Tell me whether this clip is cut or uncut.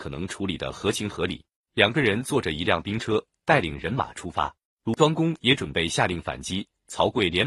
cut